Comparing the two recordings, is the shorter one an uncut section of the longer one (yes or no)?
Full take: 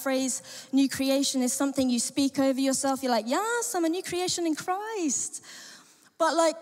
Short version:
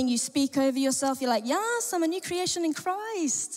yes